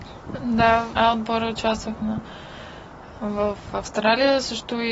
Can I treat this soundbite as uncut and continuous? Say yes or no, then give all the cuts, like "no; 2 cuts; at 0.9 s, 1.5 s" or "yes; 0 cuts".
no; 1 cut; at 0.9 s